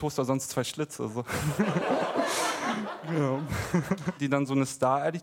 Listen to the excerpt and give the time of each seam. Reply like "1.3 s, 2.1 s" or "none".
4.2 s